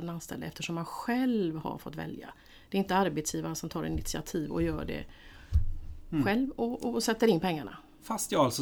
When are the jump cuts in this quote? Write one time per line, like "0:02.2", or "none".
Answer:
none